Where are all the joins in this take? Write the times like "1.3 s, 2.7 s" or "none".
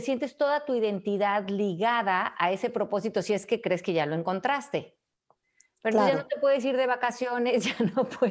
none